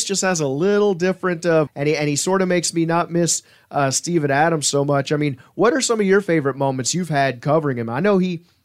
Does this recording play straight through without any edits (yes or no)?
no